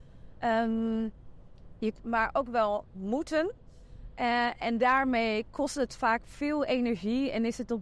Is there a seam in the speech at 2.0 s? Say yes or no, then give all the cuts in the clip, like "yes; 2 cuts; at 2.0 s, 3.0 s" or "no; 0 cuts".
yes; 1 cut; at 2.0 s